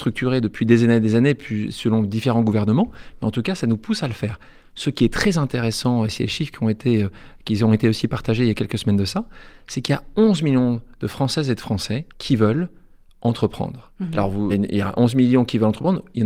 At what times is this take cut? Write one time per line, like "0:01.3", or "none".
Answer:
0:12.1
0:14.5